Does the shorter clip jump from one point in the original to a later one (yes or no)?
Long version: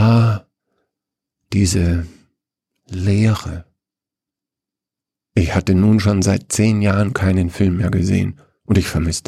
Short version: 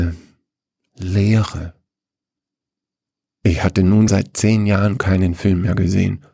yes